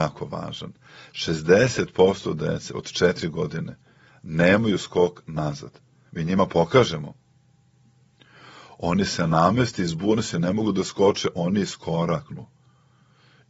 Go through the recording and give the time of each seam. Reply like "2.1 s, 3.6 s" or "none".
none

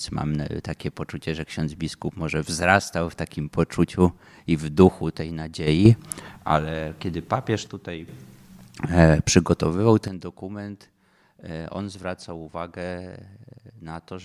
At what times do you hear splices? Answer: none

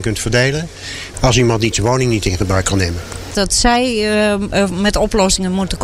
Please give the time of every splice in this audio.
1.1 s, 3.3 s

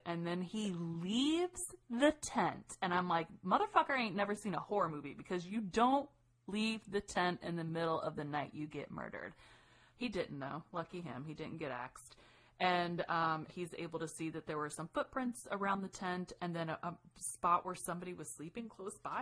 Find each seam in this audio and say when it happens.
13.5 s

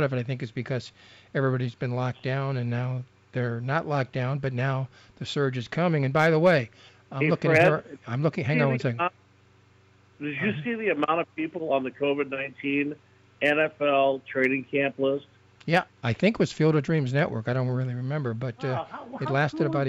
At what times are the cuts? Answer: 15.9 s

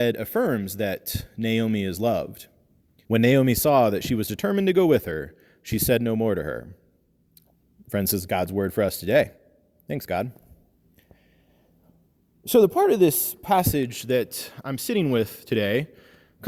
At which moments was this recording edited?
3.0 s

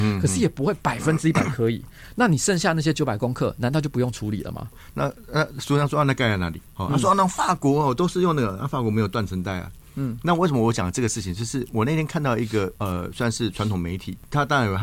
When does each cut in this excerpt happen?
4.9 s

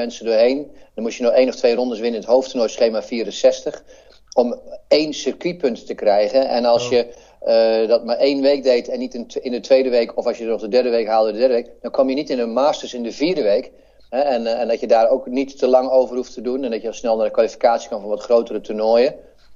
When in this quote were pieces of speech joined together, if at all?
14.1 s

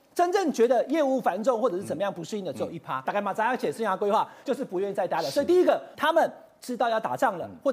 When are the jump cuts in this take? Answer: 3.0 s, 4.4 s, 5.9 s

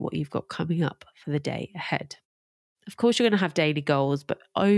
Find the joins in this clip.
2.7 s

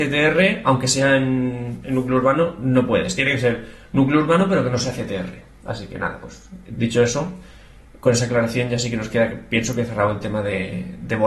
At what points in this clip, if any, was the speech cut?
none

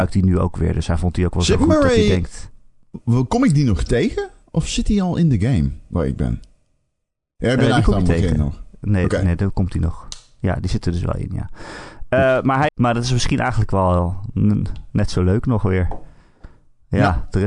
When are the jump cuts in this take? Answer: 12.7 s

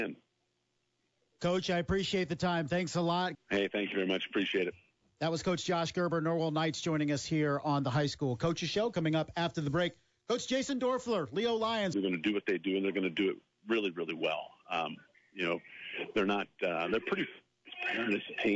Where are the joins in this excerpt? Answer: 3.3 s, 11.9 s

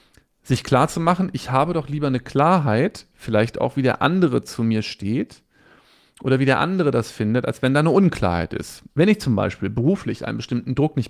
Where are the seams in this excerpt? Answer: 8.9 s

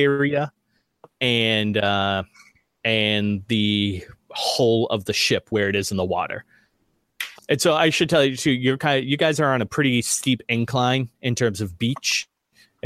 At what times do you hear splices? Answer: 7.4 s, 9.7 s

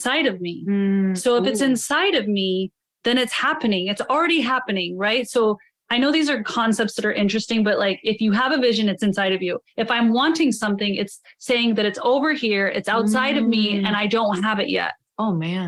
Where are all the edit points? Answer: none

